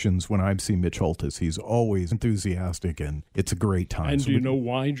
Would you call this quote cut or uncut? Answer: cut